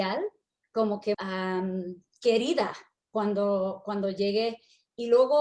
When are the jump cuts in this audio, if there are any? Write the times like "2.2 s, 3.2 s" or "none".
1.1 s